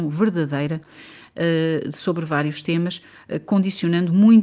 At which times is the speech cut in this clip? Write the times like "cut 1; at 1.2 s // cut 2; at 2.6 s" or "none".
none